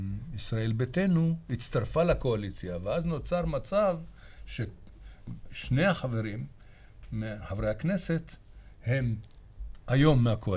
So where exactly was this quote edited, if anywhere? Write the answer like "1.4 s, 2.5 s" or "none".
none